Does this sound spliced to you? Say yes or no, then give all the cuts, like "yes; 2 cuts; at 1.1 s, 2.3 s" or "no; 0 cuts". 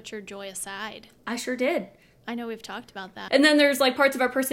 yes; 1 cut; at 3.3 s